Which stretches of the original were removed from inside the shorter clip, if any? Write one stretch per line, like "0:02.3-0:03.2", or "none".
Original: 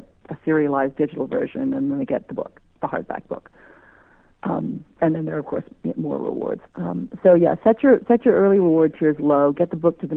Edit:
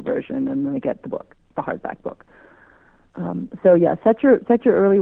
0:04.3-0:06.7